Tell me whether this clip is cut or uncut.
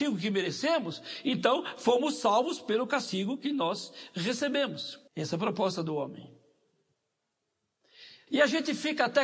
cut